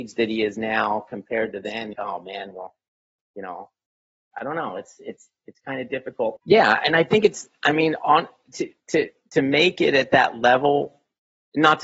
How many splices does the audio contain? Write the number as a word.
two